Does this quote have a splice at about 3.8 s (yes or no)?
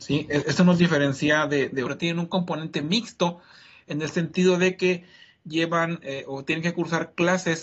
no